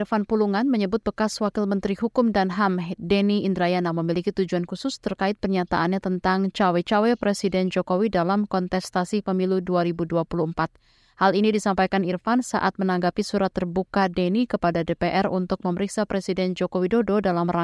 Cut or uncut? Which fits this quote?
uncut